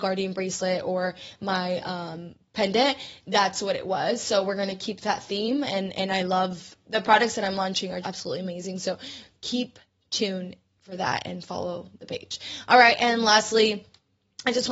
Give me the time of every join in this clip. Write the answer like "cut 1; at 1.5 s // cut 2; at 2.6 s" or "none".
cut 1; at 8.0 s